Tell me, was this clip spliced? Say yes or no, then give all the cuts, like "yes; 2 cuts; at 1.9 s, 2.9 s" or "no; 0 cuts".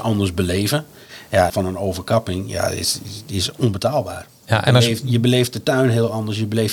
yes; 2 cuts; at 1.5 s, 4.3 s